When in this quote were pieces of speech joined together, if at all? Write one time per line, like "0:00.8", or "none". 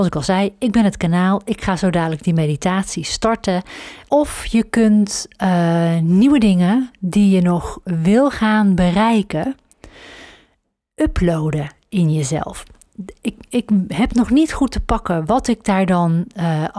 0:04.1

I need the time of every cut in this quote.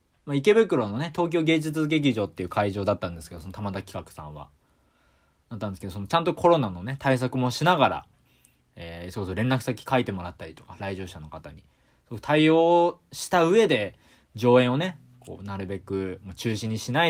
none

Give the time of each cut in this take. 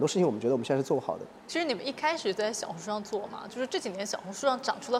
0:01.4

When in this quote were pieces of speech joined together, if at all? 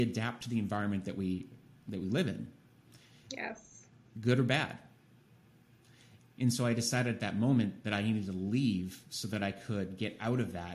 none

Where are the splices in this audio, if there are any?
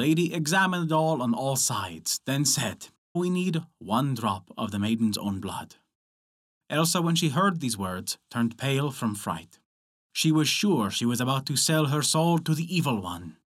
0:03.2

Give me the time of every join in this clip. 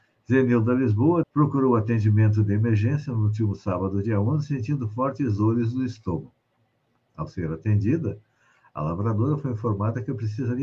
0:01.2

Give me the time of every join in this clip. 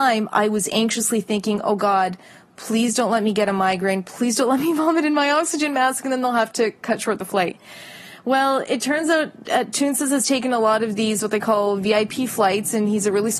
none

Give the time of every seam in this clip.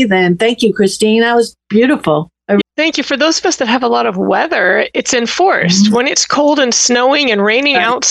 0:02.6

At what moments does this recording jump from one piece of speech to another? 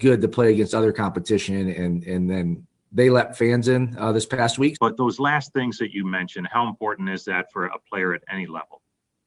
0:04.7

